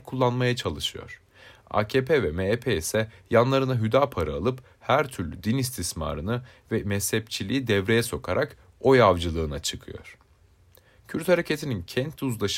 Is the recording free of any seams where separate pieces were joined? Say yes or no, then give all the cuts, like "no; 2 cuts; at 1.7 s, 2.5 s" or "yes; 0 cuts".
yes; 0 cuts